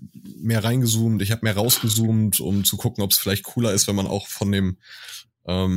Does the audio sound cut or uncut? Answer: uncut